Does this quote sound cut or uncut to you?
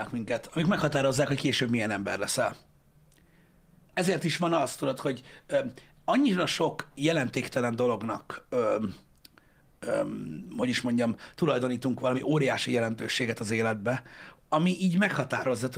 uncut